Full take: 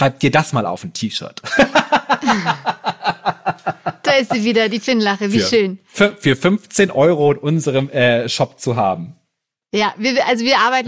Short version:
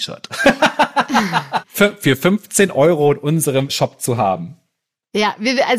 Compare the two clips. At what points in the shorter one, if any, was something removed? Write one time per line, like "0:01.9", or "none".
0:01.6
0:03.7